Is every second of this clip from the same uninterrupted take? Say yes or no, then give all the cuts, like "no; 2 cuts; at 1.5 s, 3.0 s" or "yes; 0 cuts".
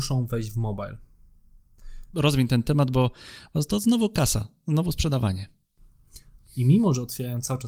no; 2 cuts; at 2.1 s, 6.4 s